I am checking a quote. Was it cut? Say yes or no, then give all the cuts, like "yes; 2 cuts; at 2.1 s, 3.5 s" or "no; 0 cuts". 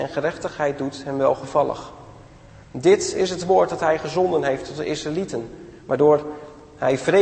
no; 0 cuts